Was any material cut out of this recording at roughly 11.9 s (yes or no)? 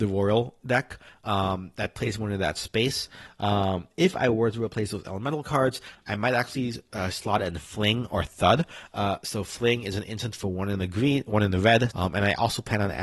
yes